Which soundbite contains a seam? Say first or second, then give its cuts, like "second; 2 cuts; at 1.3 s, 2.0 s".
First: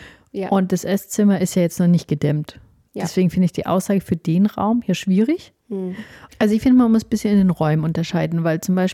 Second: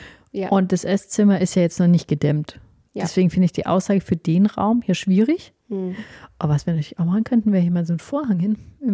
first; 1 cut; at 6.3 s